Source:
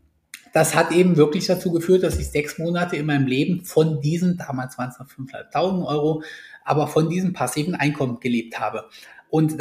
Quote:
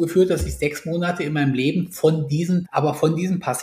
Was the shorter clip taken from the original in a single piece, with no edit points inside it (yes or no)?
no